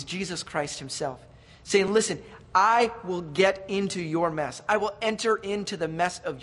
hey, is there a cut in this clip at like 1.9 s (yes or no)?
no